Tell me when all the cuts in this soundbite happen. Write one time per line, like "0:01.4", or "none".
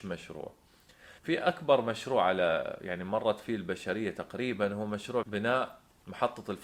0:01.2
0:05.2